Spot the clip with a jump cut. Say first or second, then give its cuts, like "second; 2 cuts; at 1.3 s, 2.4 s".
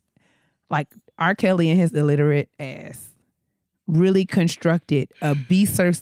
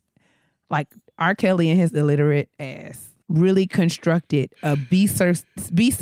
second; 1 cut; at 3.2 s